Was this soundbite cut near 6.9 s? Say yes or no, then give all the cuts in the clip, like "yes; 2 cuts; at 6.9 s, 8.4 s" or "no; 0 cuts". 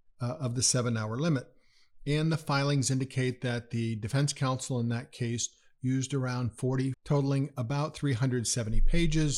yes; 1 cut; at 6.9 s